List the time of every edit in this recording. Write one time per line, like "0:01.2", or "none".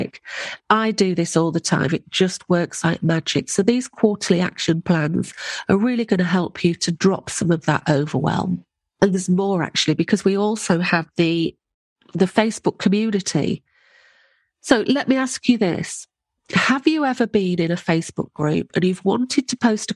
0:01.9